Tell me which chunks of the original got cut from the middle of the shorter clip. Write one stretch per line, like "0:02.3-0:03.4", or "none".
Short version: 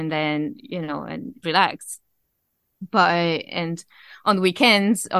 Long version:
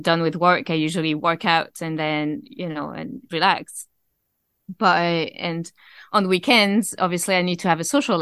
none